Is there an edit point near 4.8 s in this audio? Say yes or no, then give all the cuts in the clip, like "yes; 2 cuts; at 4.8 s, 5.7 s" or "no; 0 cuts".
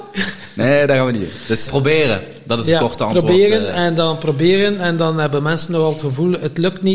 no; 1 cut; at 1.7 s